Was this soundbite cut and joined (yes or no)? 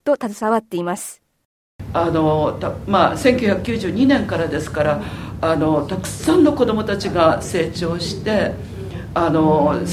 no